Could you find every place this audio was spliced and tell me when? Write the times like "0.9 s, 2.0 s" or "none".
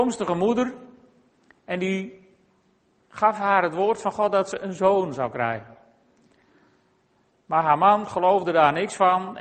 none